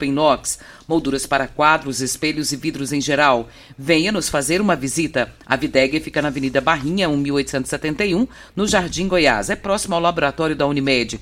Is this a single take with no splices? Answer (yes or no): yes